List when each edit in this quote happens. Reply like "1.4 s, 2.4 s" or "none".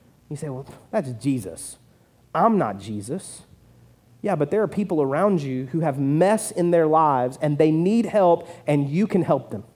none